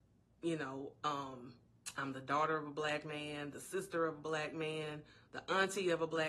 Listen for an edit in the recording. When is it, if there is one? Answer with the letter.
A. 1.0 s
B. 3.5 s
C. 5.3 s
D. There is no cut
D